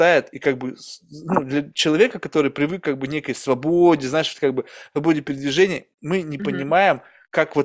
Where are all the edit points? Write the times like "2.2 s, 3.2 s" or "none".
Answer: none

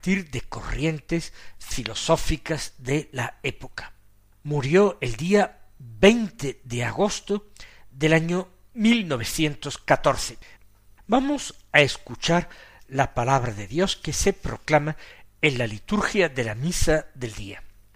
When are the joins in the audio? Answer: none

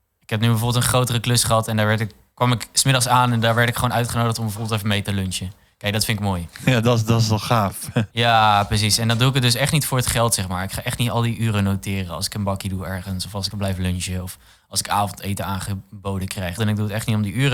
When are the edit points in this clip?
13.5 s, 16.6 s

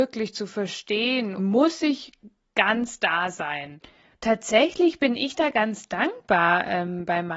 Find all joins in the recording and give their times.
1.4 s, 4.1 s

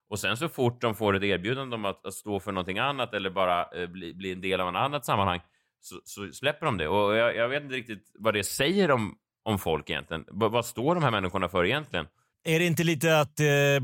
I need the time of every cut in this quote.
none

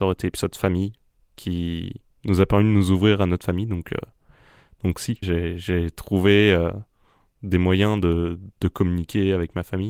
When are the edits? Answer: 5.2 s, 8.5 s

